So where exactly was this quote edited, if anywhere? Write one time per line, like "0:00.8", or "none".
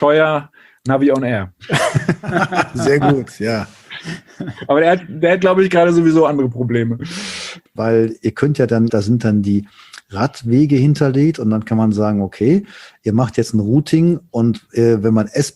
0:07.8
0:08.9